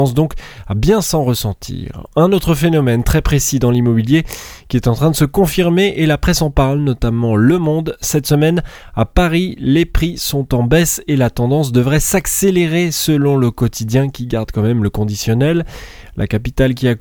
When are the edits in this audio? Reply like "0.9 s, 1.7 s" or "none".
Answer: none